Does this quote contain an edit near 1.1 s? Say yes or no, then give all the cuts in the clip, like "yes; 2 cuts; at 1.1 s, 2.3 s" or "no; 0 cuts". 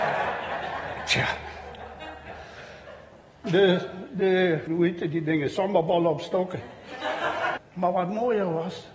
no; 3 cuts; at 3.4 s, 4.7 s, 7.6 s